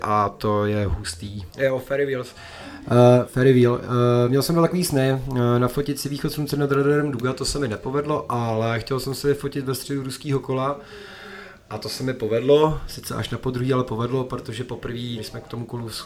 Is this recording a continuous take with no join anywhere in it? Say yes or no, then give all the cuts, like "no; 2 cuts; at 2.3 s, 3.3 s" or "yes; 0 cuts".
no; 2 cuts; at 1.5 s, 15.2 s